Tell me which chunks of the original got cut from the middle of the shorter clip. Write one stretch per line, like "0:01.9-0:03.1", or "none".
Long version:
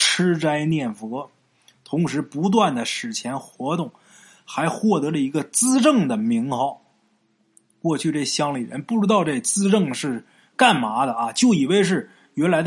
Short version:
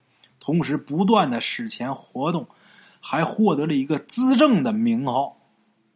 none